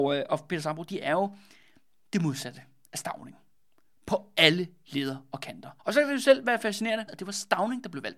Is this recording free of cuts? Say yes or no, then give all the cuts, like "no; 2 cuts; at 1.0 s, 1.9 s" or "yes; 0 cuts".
no; 2 cuts; at 5.8 s, 7.1 s